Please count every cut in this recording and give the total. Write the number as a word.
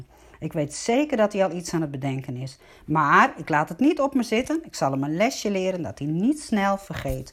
zero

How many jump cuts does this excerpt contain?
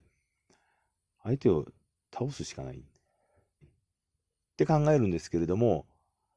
one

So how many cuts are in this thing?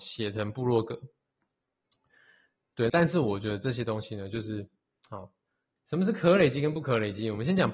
two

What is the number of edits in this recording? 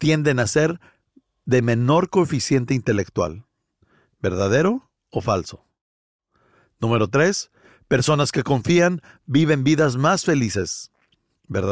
one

